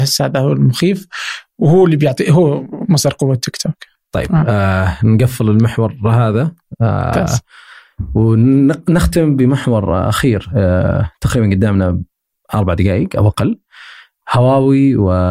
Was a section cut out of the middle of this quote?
no; 0 cuts

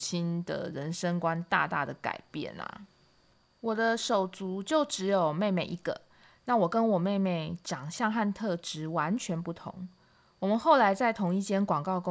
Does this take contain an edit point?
no; 0 cuts

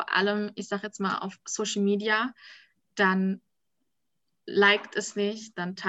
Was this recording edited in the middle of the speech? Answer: no; 0 cuts

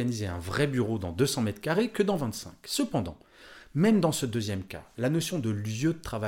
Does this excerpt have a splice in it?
no; 0 cuts

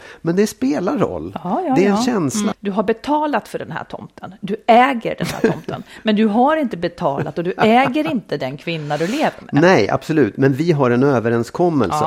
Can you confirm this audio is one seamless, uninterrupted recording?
no; 1 cut; at 2.5 s

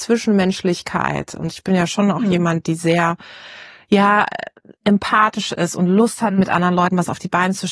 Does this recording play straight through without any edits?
yes; 0 cuts

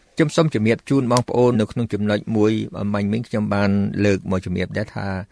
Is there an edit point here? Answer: yes; 1 cut; at 1.5 s

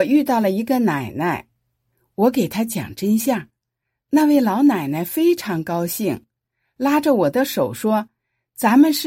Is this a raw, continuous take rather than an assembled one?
yes; 0 cuts

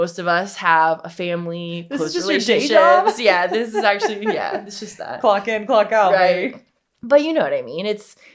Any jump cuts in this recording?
no; 0 cuts

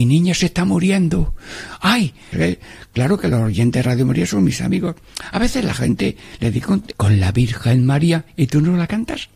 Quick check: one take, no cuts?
no; 2 cuts; at 2.3 s, 6.9 s

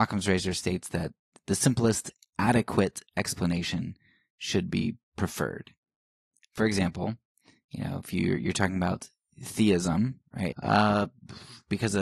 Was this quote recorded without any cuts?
no; 1 cut; at 10.5 s

